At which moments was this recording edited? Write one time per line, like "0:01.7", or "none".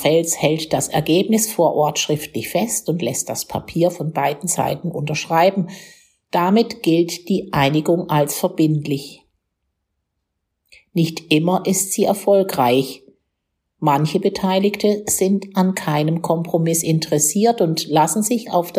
none